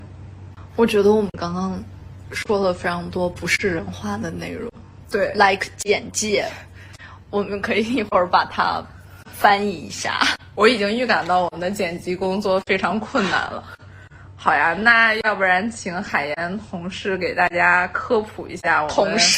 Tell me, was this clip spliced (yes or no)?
no